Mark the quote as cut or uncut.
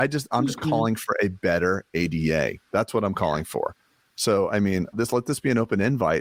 cut